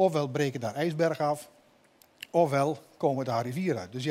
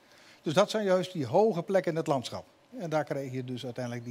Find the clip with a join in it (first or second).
second